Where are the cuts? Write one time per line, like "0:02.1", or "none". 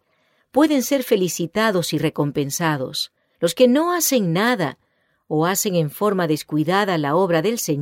0:03.4